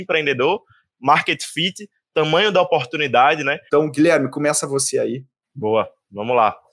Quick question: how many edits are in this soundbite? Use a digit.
1